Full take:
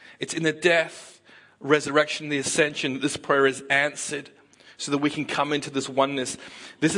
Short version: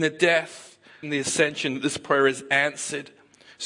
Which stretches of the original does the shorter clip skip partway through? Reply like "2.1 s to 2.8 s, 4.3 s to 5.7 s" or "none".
1.5 s to 2.2 s